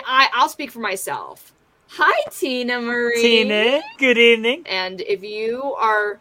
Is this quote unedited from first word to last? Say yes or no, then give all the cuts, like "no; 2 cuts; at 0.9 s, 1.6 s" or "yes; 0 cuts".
no; 1 cut; at 4.6 s